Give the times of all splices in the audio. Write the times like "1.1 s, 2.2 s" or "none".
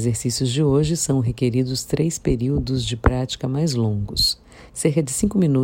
4.7 s